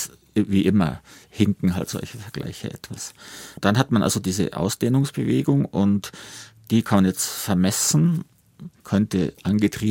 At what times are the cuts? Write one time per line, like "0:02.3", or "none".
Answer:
0:08.8